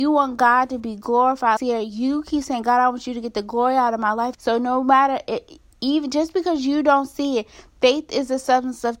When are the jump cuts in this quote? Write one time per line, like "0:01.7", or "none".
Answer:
0:01.6
0:04.3